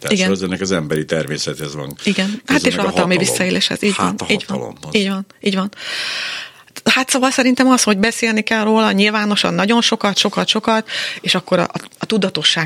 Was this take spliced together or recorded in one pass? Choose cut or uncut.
uncut